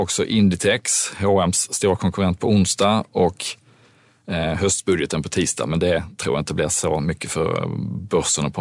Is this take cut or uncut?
uncut